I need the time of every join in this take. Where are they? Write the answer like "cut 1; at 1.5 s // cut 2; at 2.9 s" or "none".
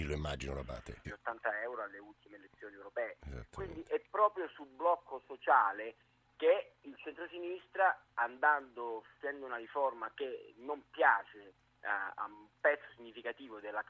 cut 1; at 1.0 s